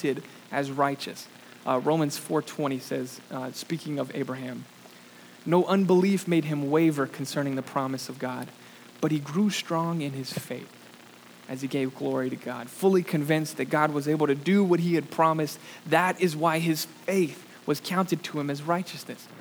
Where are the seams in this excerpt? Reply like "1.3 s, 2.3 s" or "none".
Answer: none